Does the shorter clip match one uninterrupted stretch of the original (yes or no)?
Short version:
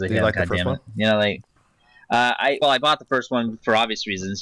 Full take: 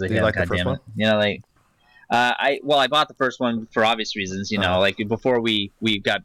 no